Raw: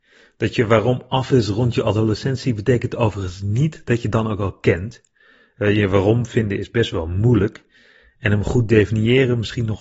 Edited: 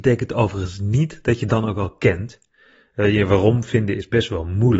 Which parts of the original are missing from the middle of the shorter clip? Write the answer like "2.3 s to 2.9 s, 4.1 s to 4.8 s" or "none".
none